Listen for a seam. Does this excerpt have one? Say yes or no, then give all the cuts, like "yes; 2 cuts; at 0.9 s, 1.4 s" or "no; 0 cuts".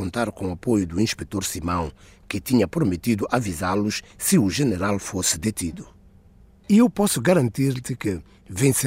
no; 0 cuts